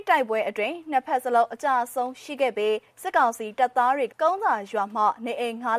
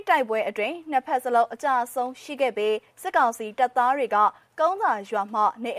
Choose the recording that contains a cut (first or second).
first